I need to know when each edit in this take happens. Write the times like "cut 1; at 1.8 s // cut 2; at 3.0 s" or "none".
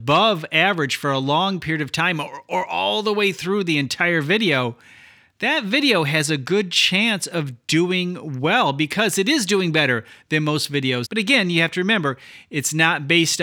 cut 1; at 11.0 s